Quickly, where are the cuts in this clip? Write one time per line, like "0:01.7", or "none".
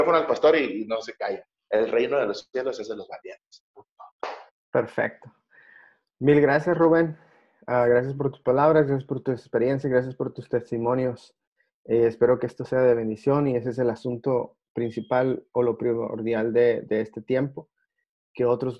none